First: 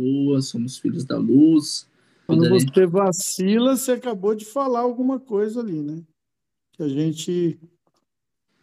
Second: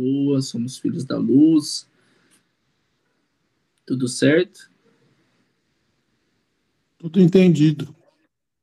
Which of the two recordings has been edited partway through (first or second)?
first